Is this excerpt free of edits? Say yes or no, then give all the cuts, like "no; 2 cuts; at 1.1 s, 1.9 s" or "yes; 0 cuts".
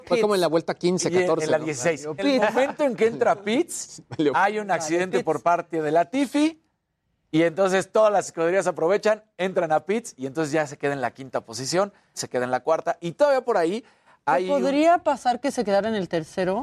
no; 2 cuts; at 2.2 s, 12.1 s